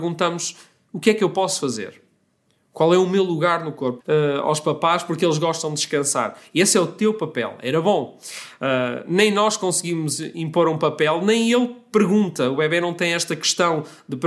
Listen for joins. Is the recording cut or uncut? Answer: cut